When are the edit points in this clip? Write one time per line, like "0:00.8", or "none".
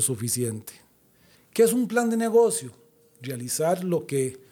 0:01.3